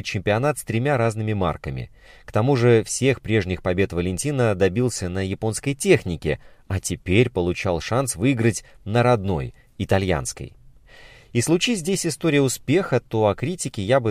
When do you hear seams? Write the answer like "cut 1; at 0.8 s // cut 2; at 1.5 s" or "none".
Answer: none